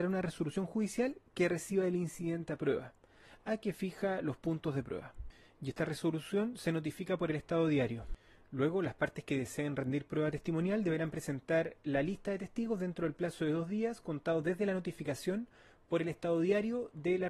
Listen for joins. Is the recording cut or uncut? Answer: uncut